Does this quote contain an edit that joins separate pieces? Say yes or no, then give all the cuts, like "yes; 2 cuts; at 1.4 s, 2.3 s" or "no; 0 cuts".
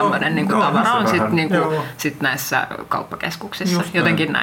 no; 0 cuts